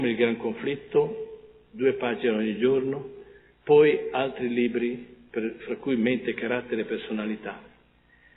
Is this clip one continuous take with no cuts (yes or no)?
yes